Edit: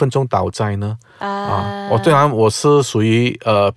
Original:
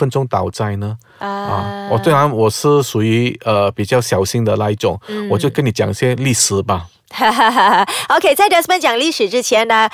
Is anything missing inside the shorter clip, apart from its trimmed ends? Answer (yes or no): no